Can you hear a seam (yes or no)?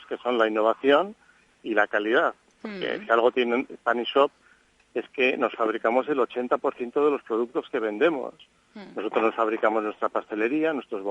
no